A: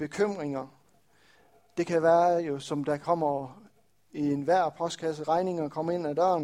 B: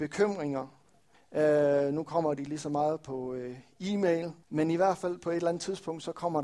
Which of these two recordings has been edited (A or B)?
B